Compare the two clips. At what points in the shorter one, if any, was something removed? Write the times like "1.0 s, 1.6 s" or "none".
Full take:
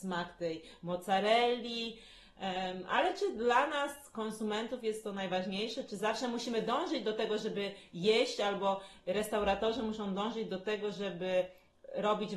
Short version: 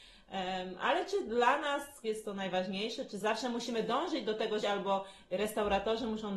2.0 s, 4.6 s